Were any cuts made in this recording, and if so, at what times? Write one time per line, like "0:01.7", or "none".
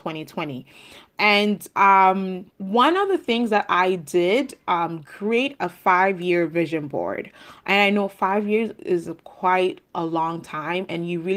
0:02.5
0:05.0